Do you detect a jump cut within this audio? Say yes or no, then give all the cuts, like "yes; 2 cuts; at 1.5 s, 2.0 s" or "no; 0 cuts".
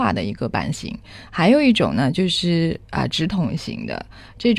yes; 1 cut; at 1.3 s